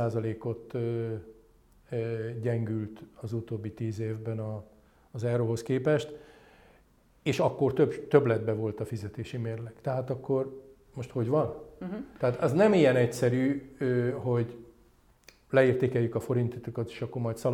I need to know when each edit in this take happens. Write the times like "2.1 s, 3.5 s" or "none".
none